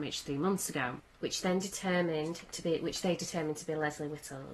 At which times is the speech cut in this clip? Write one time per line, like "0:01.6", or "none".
0:01.1